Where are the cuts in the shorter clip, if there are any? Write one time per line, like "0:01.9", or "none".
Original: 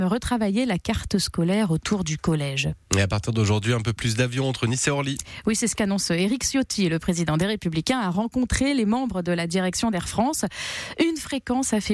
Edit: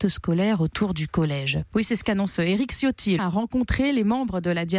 0:01.7
0:03.2